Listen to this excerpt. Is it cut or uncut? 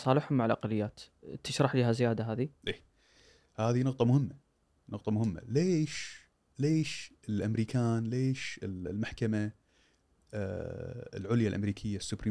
uncut